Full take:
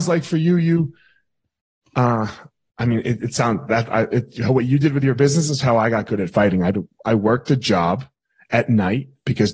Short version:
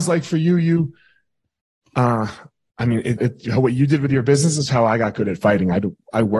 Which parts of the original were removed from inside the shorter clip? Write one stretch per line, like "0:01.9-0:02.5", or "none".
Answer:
0:03.2-0:04.1